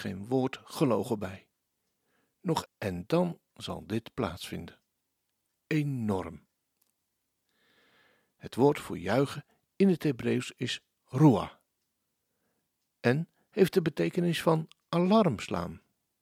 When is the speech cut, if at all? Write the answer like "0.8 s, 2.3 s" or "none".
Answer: 2.7 s

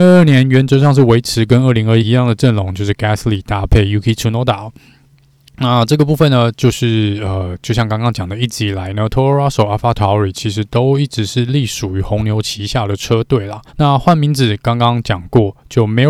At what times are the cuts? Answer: 2.0 s, 13.7 s

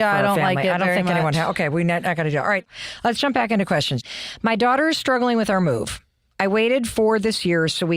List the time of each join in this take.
none

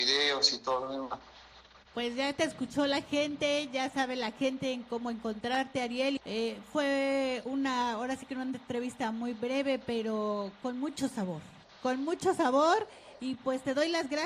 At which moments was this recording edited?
6.2 s

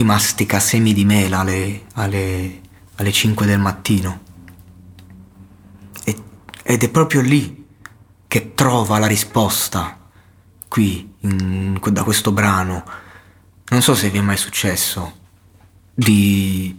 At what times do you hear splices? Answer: none

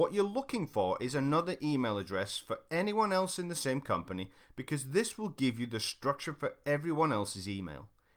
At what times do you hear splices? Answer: none

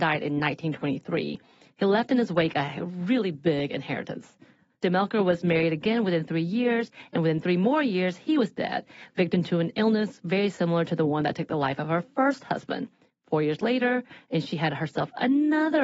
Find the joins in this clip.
none

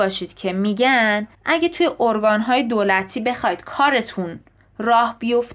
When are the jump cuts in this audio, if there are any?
1.3 s

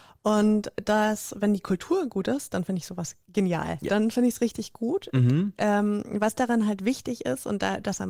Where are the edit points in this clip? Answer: 3.9 s

